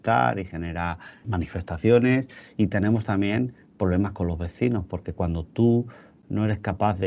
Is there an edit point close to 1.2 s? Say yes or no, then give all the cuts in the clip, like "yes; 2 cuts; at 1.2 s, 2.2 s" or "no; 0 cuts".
no; 0 cuts